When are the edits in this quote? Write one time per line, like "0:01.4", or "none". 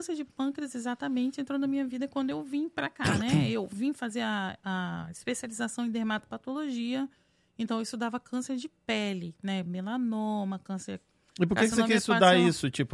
none